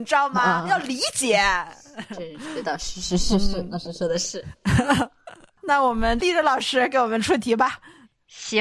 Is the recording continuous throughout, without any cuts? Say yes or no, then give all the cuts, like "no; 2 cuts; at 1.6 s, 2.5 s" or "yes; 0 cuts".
yes; 0 cuts